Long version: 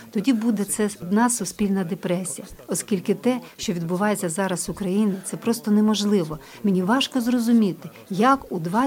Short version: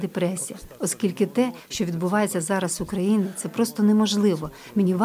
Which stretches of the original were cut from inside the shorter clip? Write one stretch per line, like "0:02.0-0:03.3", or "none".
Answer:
none